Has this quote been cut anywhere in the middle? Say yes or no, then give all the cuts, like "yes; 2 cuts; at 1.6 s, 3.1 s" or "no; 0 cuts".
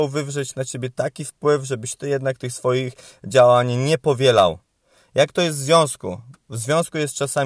no; 0 cuts